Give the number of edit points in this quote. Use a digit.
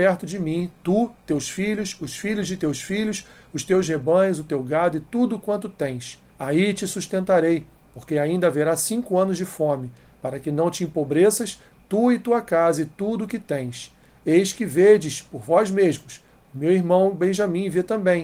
1